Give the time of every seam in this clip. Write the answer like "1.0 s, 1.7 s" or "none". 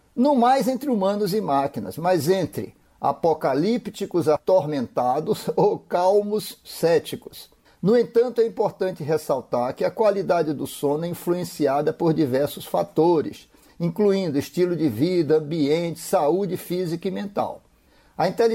7.6 s